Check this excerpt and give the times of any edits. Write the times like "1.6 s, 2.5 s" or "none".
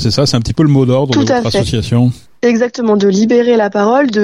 none